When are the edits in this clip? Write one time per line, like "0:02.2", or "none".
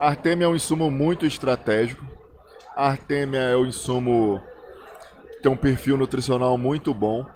none